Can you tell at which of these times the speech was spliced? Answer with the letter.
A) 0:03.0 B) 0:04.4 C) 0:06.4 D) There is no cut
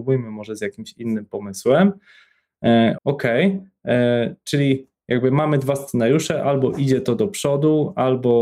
A